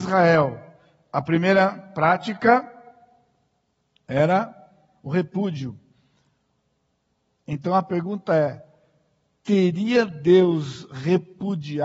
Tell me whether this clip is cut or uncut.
uncut